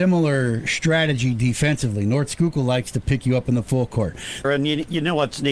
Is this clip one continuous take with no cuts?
no; 1 cut; at 4.4 s

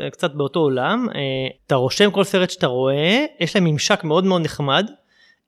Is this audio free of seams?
no; 1 cut; at 1.5 s

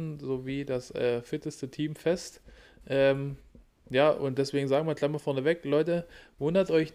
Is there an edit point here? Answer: no; 0 cuts

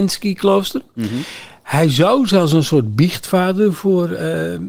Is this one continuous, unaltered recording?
yes; 0 cuts

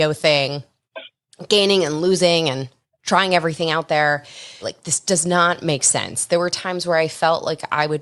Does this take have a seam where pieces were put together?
yes; 1 cut; at 4.6 s

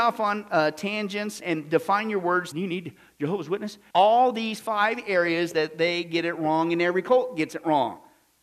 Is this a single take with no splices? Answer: no; 3 cuts; at 1.4 s, 2.5 s, 3.9 s

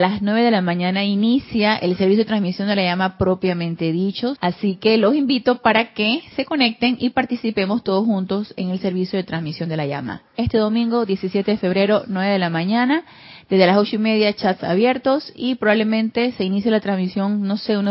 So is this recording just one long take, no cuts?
no; 1 cut; at 4.4 s

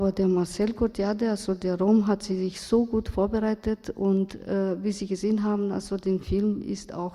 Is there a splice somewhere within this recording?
no; 0 cuts

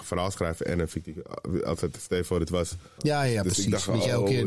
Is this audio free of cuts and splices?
no; 1 cut; at 3.0 s

